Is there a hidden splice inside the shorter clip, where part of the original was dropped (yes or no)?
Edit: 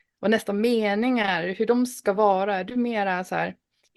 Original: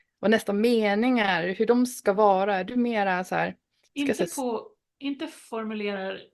no